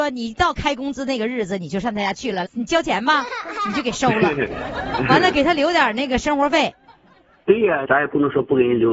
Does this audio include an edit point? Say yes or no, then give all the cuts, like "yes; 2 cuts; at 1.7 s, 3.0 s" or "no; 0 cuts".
yes; 2 cuts; at 2.5 s, 7.9 s